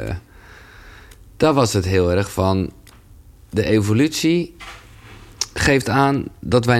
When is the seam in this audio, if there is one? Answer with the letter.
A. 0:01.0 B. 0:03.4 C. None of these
C